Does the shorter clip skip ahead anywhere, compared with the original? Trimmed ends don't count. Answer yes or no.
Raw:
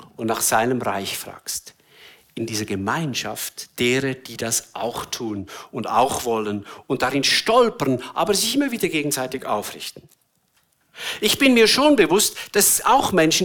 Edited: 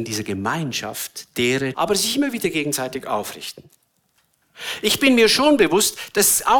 yes